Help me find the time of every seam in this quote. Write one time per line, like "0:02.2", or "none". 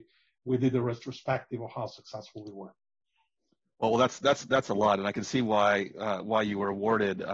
none